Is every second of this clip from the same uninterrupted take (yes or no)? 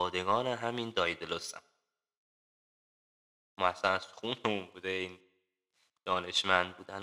yes